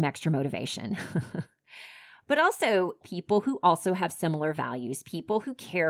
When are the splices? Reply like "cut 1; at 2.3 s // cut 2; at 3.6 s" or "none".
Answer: cut 1; at 3.0 s